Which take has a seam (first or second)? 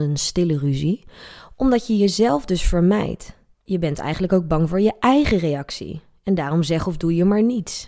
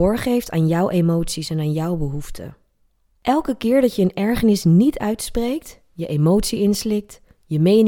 first